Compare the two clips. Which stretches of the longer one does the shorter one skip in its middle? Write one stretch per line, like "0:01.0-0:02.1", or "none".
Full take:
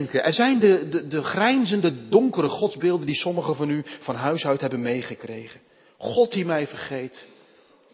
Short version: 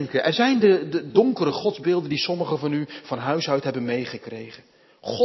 0:01.1-0:02.1